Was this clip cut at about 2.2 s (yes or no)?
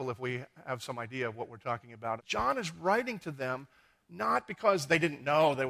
yes